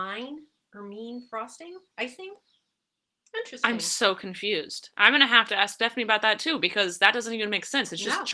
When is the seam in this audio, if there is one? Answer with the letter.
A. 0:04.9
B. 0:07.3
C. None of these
C